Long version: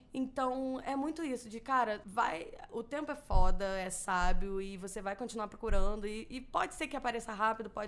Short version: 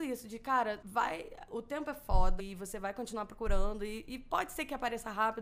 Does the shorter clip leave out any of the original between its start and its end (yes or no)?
yes